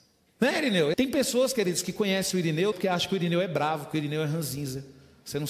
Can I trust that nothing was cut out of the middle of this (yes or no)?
no